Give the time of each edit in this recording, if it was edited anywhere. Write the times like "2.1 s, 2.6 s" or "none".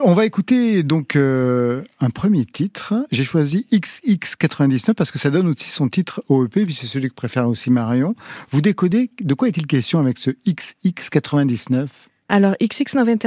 none